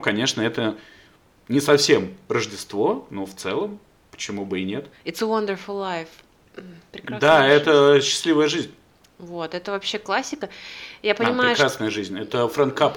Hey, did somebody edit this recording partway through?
yes; 1 cut; at 4.9 s

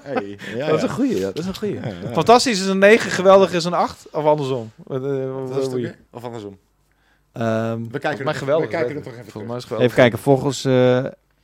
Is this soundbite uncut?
no; 1 cut; at 6.1 s

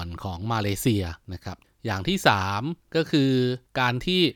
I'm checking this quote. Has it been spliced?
no; 0 cuts

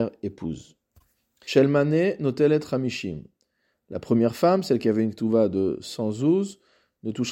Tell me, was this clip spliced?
yes; 1 cut; at 1.5 s

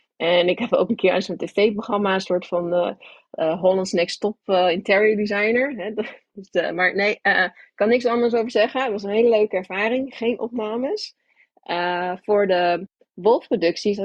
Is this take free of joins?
yes; 0 cuts

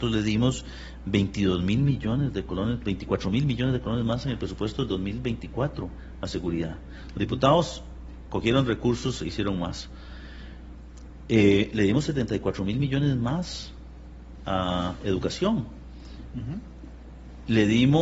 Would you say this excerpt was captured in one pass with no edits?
yes; 0 cuts

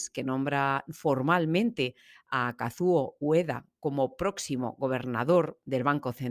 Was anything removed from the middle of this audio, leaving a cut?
no; 0 cuts

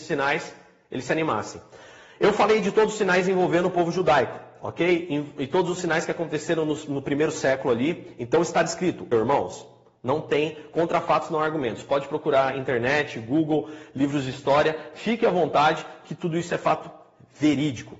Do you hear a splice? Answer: yes; 1 cut; at 9.1 s

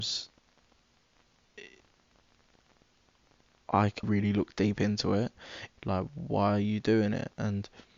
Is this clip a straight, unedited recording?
no; 2 cuts; at 4.0 s, 5.7 s

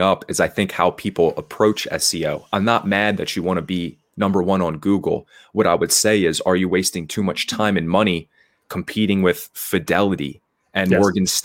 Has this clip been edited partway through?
no; 0 cuts

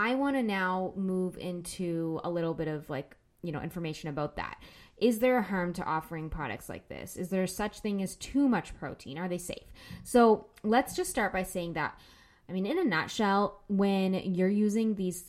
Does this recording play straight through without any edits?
yes; 0 cuts

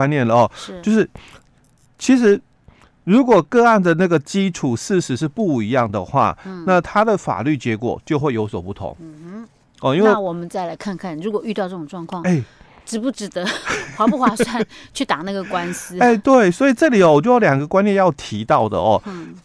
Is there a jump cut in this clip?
no; 0 cuts

